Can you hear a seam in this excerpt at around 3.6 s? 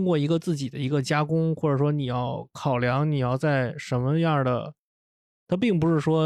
no; 1 cut; at 5.3 s

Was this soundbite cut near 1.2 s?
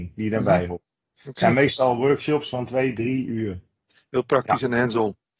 no; 1 cut; at 4.1 s

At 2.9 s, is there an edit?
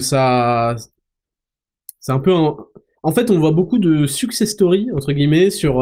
no; 0 cuts

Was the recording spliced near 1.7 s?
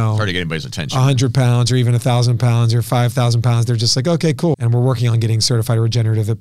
no; 1 cut; at 4.5 s

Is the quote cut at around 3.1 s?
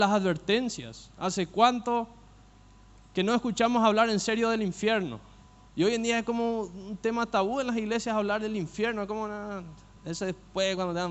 no; 1 cut; at 5.7 s

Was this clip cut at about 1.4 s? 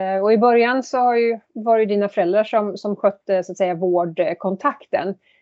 no; 0 cuts

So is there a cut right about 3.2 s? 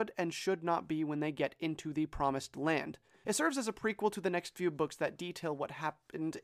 yes; 1 cut; at 3.2 s

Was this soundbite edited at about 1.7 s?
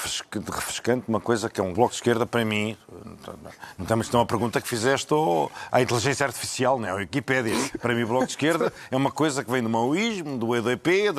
yes; 1 cut; at 1.7 s

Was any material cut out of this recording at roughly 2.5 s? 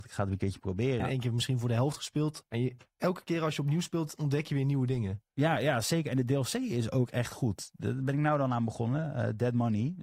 yes; 2 cuts; at 1.0 s, 2.5 s

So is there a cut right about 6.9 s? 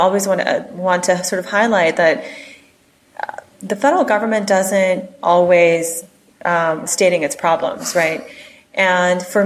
yes; 1 cut; at 6.9 s

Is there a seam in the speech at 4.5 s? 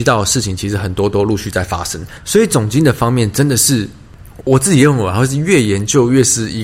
yes; 1 cut; at 4.5 s

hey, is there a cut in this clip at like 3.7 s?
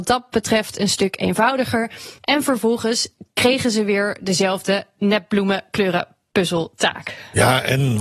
no; 1 cut; at 2.2 s

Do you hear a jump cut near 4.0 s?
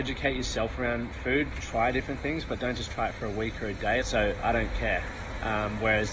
yes; 1 cut; at 4.0 s

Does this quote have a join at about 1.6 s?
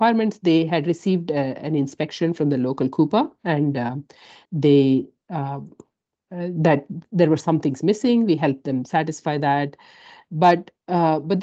no; 1 cut; at 4.5 s

